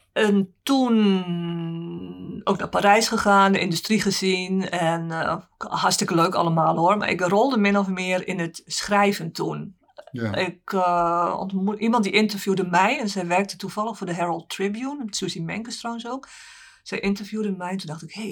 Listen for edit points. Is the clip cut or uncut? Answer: uncut